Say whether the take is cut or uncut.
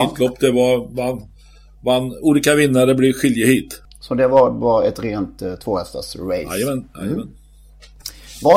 uncut